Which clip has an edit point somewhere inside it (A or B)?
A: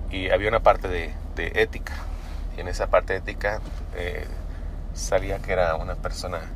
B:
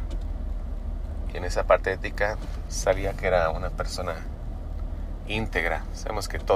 B